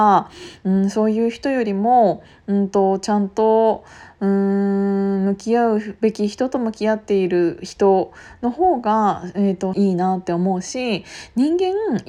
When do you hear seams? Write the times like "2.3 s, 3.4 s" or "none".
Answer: 9.7 s

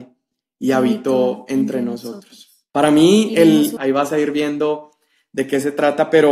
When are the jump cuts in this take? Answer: 2.7 s, 3.8 s

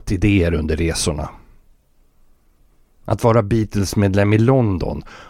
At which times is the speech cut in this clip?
none

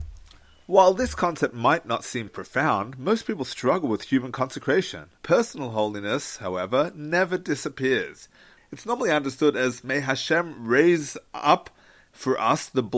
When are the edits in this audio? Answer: 2.3 s, 5.2 s, 8.6 s

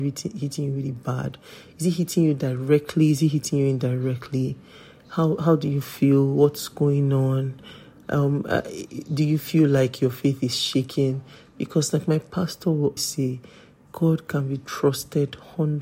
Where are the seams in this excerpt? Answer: 13.0 s

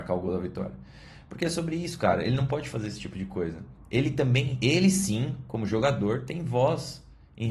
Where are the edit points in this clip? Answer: none

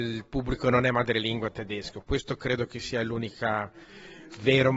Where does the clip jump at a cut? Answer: none

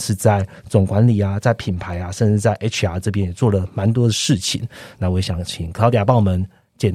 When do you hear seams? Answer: none

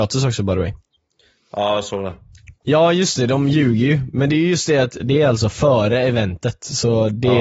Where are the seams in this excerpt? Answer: 2.6 s, 5.0 s

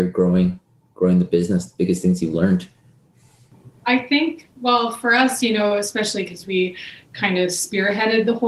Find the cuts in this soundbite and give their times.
none

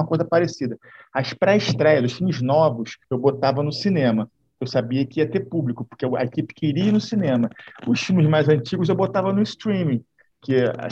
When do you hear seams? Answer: 3.0 s

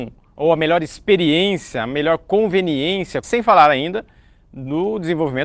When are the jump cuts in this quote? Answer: 3.2 s

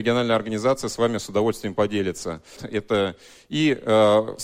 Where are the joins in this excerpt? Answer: 2.6 s

